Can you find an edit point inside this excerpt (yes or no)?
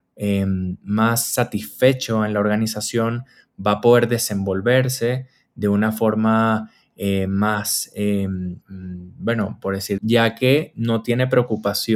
yes